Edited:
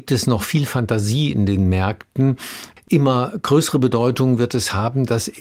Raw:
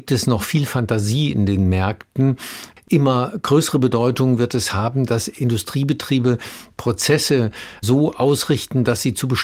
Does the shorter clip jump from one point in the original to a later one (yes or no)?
no